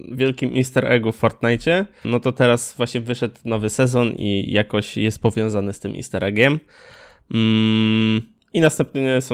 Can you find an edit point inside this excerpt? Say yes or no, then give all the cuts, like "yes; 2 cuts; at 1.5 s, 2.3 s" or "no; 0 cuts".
yes; 1 cut; at 2.0 s